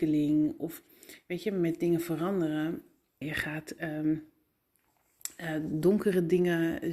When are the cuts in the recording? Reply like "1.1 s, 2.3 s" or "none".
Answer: 3.2 s